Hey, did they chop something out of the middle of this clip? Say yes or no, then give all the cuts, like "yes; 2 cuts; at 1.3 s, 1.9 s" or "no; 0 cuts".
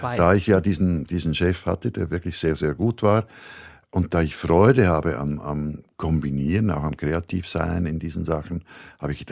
no; 0 cuts